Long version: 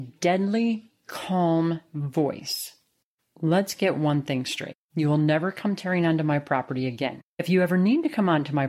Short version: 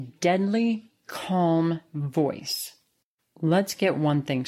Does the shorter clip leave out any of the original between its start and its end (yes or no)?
no